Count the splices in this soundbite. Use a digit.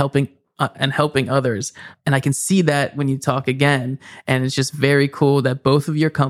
0